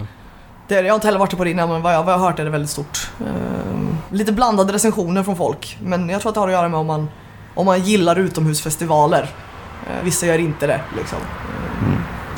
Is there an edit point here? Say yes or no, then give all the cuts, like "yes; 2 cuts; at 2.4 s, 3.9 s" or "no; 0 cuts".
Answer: yes; 1 cut; at 10.0 s